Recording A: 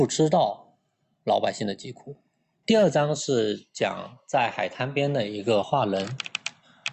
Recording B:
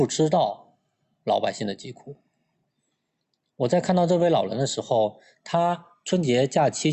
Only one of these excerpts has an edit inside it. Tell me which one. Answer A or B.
A